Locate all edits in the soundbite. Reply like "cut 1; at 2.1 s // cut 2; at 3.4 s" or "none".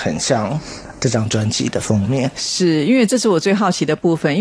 cut 1; at 1.0 s